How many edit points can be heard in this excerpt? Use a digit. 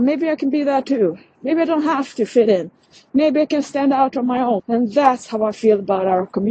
1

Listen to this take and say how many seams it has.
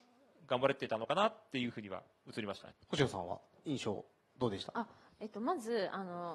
1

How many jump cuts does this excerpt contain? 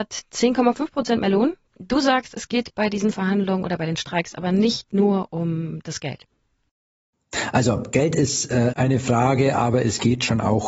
2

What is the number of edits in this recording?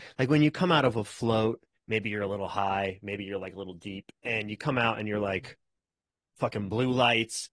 0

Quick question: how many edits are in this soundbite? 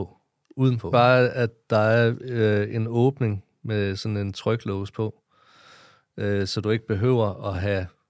1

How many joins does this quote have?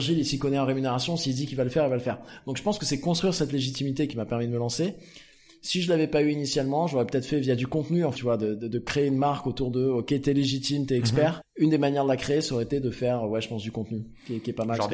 2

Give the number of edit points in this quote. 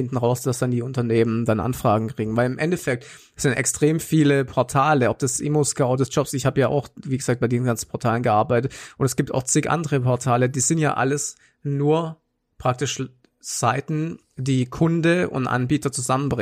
0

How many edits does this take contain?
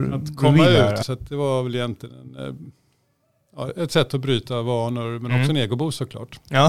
1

